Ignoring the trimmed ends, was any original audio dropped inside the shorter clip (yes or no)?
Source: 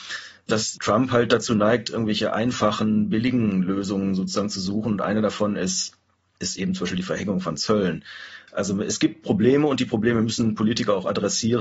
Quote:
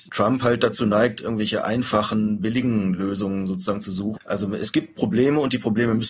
yes